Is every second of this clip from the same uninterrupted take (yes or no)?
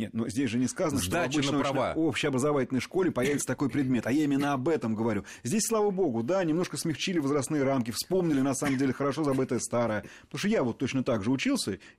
yes